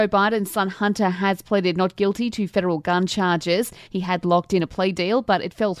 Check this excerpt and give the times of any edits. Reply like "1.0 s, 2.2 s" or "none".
3.9 s